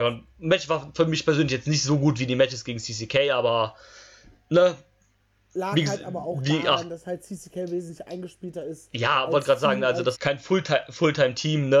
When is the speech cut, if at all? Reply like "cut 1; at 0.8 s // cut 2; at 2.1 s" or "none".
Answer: cut 1; at 10.1 s